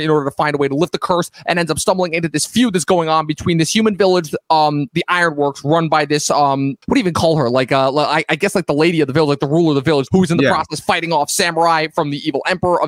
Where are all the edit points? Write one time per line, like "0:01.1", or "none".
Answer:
0:06.8
0:10.1